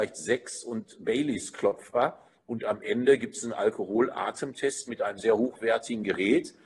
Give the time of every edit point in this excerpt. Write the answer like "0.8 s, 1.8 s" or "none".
2.4 s, 4.9 s